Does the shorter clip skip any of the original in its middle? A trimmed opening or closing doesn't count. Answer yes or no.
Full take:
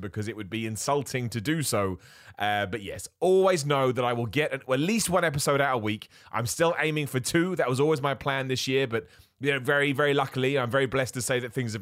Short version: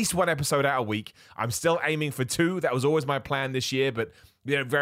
no